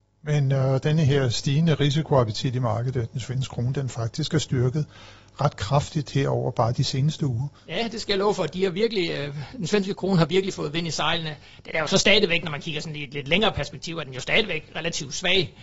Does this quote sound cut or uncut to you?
cut